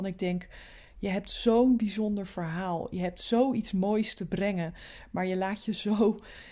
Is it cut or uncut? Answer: uncut